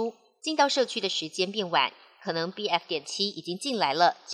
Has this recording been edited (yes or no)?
no